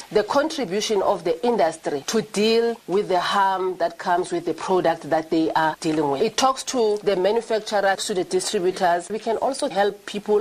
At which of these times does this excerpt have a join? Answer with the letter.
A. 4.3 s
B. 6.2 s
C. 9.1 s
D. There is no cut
C